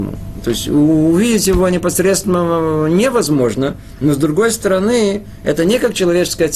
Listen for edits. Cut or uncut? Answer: uncut